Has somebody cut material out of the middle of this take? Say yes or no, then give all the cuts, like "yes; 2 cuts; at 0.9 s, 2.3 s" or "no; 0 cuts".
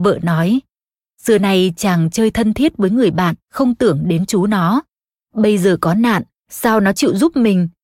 yes; 1 cut; at 3.4 s